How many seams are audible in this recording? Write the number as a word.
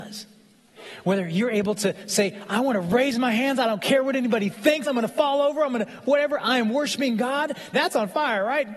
two